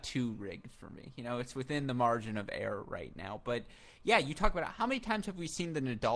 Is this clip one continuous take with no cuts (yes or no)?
yes